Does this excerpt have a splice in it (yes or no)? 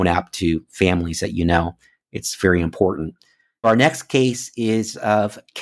yes